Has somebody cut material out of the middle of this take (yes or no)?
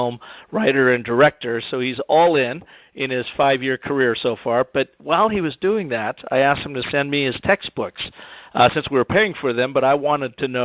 no